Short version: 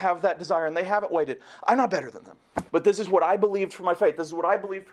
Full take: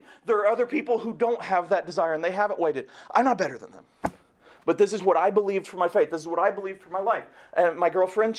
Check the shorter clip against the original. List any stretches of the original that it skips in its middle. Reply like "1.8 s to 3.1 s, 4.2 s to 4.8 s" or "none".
4.2 s to 4.6 s